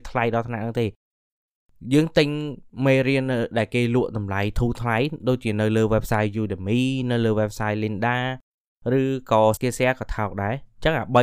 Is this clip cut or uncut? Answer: cut